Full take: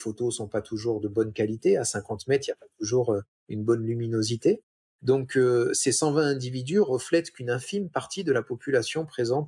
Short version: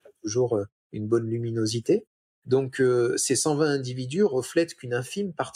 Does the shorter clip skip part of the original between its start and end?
no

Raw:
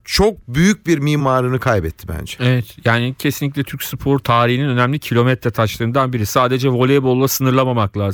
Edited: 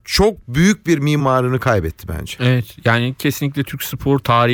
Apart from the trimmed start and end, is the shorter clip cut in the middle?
no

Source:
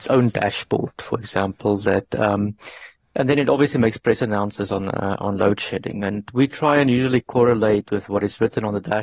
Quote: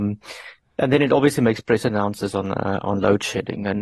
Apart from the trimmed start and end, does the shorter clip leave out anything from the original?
no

